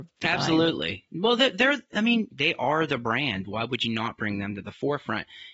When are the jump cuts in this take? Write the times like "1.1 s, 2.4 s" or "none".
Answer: 2.3 s, 3.4 s